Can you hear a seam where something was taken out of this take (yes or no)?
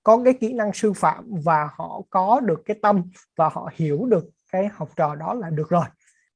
no